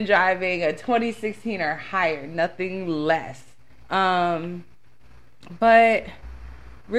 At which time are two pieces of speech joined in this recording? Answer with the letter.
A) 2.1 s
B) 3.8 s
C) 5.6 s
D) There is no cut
B